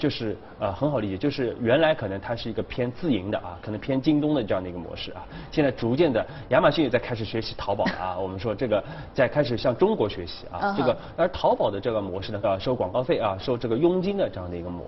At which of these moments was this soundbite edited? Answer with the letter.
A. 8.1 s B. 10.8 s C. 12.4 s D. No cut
C